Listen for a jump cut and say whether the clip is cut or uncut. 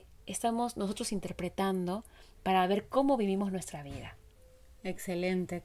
uncut